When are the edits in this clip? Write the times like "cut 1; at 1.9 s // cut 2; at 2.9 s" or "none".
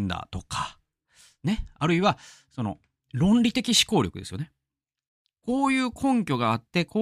none

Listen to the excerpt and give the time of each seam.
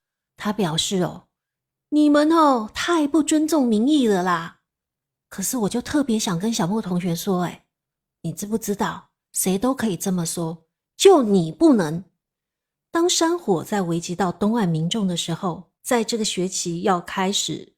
cut 1; at 15.8 s

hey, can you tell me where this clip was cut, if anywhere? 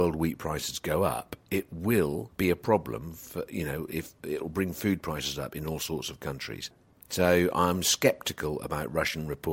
none

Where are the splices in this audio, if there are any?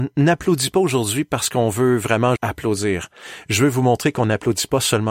cut 1; at 2.4 s

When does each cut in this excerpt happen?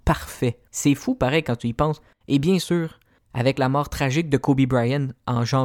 none

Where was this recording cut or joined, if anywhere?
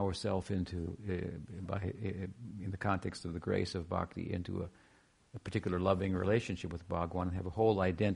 none

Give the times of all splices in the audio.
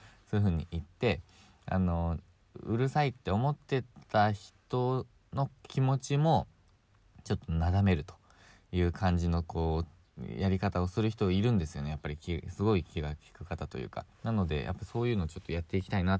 cut 1; at 14.1 s

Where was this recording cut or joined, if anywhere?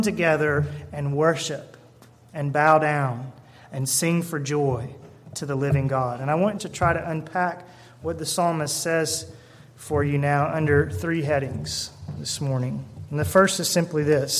cut 1; at 6.6 s

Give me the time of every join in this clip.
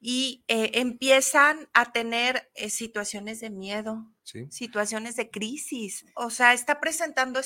cut 1; at 4.2 s // cut 2; at 6.1 s

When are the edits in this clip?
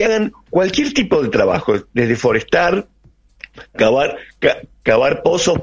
none

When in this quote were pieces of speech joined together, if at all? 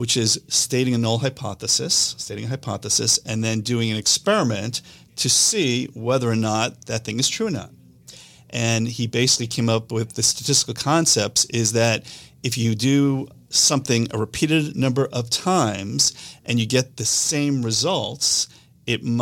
none

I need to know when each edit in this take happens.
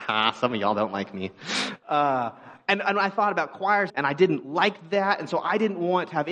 cut 1; at 3.9 s

